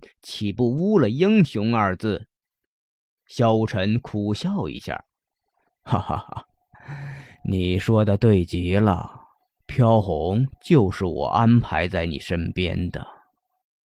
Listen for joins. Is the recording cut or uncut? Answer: uncut